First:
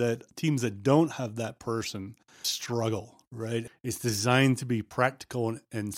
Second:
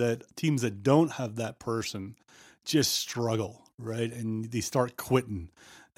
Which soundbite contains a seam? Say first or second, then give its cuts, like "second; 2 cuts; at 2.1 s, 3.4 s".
first; 2 cuts; at 2.4 s, 3.7 s